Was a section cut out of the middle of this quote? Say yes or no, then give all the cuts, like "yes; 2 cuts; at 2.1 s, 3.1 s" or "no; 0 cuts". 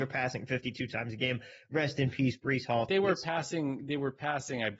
yes; 1 cut; at 2.9 s